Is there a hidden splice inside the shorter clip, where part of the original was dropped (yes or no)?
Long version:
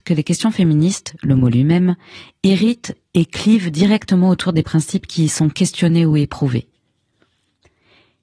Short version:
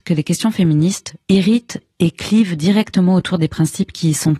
yes